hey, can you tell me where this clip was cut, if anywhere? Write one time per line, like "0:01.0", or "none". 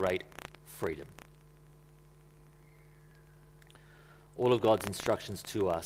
none